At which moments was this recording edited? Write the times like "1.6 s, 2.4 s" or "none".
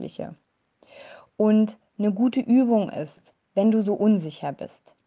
none